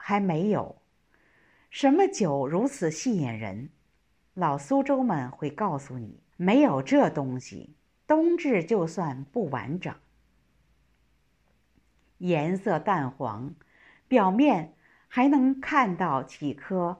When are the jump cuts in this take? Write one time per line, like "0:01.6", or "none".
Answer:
0:06.3